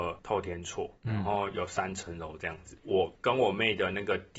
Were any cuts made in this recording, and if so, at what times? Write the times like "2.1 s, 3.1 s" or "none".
none